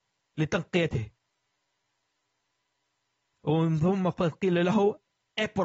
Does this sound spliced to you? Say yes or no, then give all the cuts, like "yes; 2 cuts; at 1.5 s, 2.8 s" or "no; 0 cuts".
no; 0 cuts